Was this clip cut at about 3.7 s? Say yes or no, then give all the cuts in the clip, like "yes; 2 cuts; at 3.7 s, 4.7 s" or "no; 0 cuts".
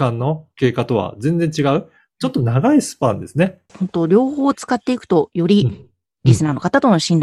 yes; 1 cut; at 3.7 s